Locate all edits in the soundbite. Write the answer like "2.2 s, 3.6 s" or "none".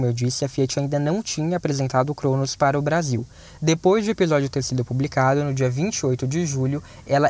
none